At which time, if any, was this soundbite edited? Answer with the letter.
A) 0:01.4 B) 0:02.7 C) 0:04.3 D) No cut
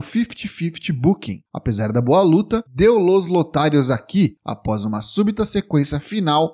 B